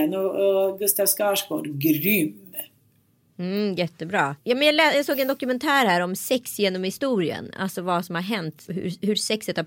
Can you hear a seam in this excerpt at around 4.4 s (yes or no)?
yes